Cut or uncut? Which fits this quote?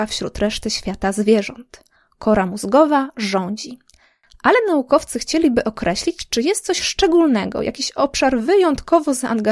uncut